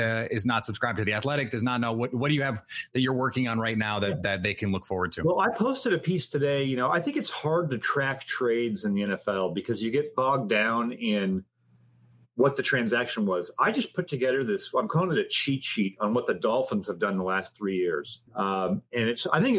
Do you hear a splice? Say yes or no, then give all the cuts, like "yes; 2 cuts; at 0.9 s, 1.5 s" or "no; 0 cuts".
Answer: yes; 1 cut; at 18.3 s